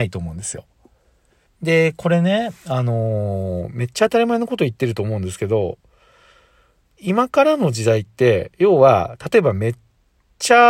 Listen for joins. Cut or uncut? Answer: cut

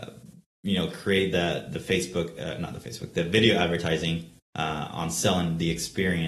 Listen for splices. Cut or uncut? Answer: uncut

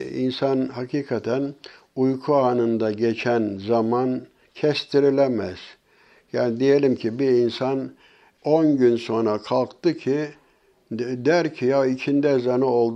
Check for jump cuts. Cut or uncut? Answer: cut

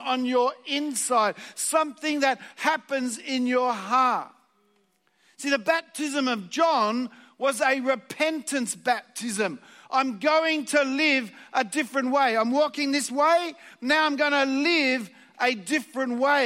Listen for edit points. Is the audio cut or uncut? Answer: uncut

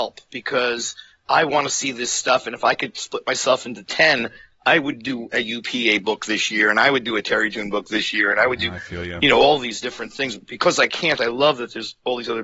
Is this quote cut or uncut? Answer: uncut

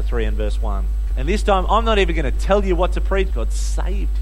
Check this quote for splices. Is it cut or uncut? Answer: cut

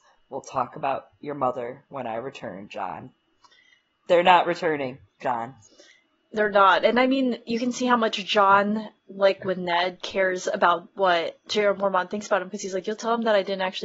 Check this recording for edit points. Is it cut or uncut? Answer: uncut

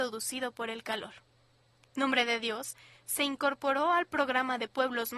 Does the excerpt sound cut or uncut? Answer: uncut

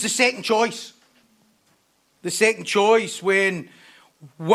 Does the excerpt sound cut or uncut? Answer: uncut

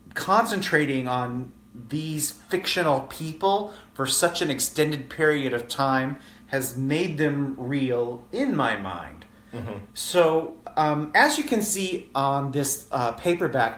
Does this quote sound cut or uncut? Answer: cut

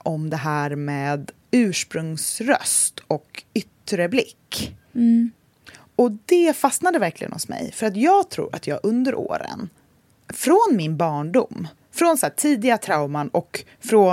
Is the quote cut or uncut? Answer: cut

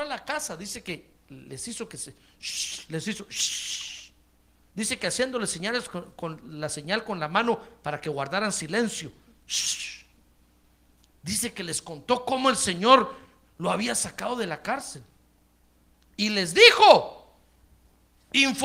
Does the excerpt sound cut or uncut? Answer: uncut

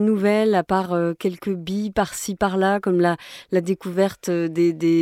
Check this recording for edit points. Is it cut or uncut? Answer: uncut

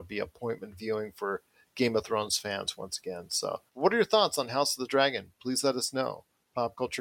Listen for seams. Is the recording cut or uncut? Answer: cut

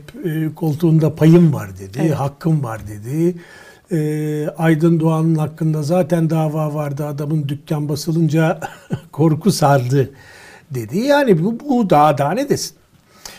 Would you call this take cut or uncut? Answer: uncut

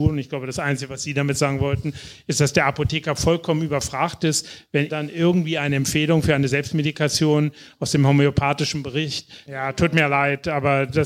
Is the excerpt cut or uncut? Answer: cut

